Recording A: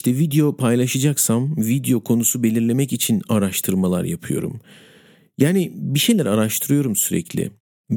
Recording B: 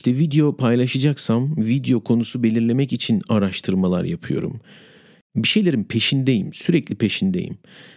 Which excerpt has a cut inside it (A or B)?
B